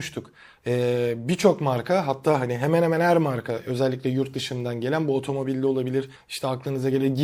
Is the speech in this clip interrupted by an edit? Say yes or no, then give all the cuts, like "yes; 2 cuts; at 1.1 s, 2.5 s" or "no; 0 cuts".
yes; 1 cut; at 6.2 s